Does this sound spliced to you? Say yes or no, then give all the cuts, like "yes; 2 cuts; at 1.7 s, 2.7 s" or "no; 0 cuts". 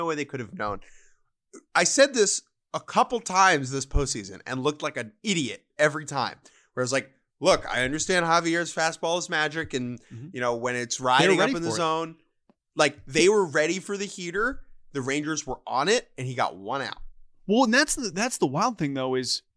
no; 0 cuts